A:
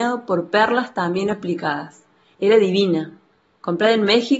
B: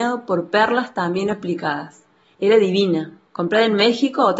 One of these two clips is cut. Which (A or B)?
B